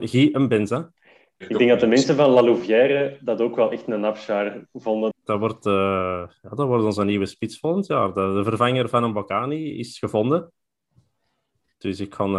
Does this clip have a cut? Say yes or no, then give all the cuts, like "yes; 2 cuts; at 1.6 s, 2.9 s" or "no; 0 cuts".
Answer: yes; 1 cut; at 5.1 s